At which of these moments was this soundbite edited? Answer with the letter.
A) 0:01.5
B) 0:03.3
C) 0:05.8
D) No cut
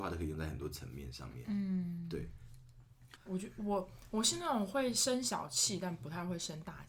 B